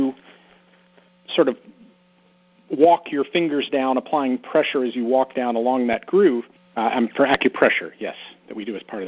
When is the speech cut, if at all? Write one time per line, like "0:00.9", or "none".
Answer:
0:06.6